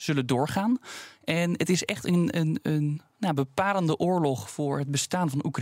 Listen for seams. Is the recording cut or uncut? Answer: uncut